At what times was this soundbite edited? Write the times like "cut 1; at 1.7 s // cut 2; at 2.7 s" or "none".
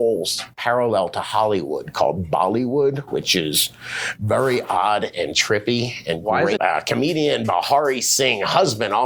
cut 1; at 6.6 s